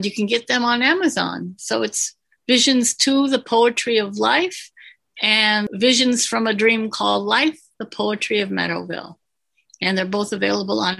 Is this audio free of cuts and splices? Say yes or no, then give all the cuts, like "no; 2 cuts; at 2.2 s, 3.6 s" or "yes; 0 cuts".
yes; 0 cuts